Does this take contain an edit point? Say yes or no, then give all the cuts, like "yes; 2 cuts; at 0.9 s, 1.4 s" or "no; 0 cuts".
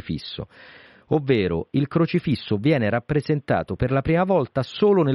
no; 0 cuts